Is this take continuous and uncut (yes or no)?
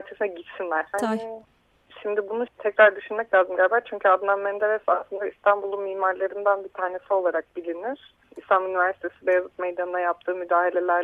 no